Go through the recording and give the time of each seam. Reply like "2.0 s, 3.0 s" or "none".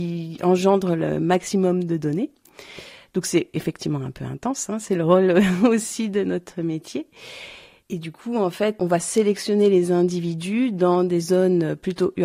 none